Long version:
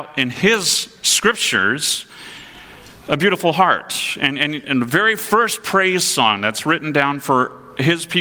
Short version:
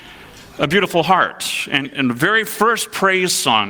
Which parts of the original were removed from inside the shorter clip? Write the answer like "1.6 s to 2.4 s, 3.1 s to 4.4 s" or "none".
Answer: 4.3 s to 4.6 s